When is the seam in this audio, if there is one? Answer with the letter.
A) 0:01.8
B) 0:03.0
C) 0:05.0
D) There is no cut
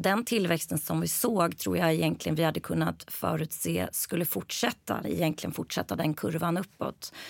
C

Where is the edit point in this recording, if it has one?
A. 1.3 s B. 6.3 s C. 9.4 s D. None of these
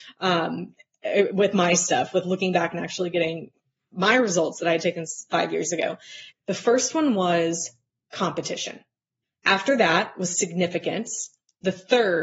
B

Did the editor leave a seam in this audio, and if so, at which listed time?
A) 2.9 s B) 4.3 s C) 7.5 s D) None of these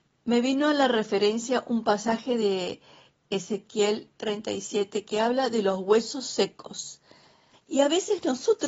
C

